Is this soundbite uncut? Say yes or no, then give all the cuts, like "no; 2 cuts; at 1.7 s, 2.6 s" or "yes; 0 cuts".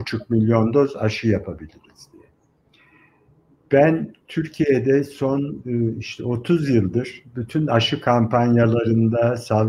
yes; 0 cuts